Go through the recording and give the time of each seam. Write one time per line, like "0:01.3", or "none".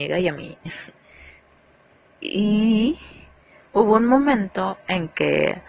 none